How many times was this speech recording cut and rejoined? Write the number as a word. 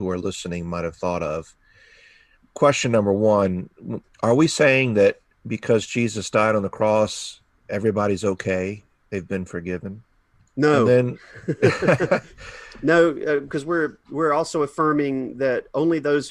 one